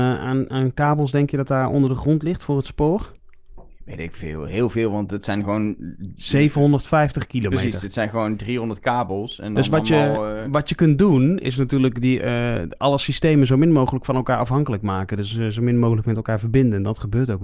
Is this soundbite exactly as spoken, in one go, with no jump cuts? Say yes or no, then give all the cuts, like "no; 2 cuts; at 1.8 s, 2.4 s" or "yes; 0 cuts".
yes; 0 cuts